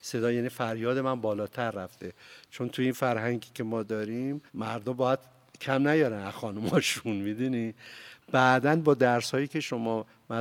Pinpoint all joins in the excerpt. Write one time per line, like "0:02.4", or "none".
0:04.5